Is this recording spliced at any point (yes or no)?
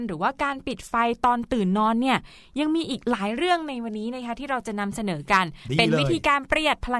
no